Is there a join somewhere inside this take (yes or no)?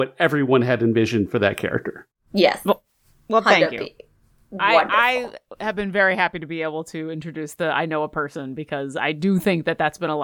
no